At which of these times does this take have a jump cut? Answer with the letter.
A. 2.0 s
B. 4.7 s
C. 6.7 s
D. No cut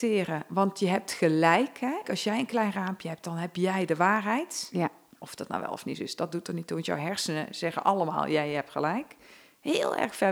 A